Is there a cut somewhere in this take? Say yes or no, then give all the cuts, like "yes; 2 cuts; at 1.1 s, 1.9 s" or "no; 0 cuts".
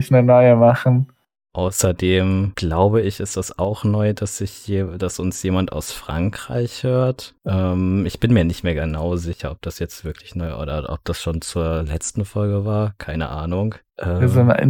no; 0 cuts